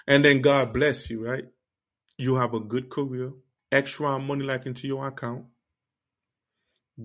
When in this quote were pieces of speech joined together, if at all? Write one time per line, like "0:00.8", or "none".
0:03.6